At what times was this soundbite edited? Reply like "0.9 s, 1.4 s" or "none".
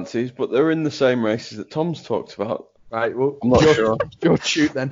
2.8 s